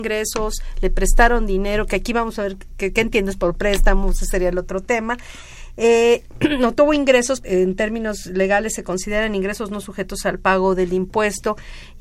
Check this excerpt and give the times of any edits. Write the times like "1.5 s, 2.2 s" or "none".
7.4 s